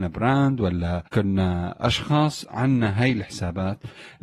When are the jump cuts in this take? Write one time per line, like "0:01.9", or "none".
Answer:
0:01.1

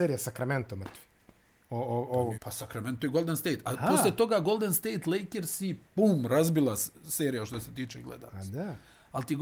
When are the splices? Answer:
0:02.3
0:05.8

